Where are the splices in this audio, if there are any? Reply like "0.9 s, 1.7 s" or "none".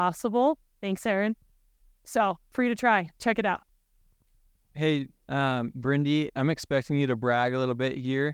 5.1 s, 6.3 s